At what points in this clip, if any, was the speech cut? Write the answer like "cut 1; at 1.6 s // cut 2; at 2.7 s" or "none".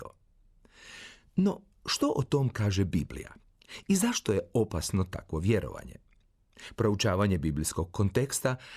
none